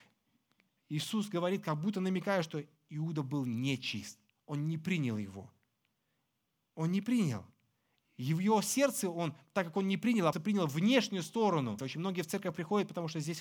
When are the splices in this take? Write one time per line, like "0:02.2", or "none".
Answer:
0:10.3
0:11.8